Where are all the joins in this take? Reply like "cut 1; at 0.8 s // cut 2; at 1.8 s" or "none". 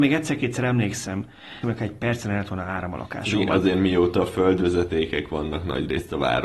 cut 1; at 1.6 s